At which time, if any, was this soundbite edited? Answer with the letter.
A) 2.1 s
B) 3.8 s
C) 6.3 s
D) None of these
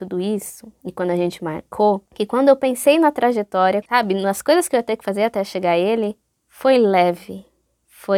B